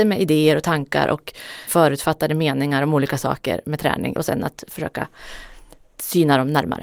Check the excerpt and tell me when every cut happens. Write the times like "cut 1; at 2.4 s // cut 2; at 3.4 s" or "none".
cut 1; at 1.7 s // cut 2; at 4.1 s